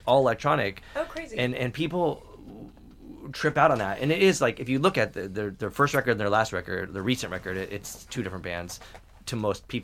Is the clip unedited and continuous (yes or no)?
yes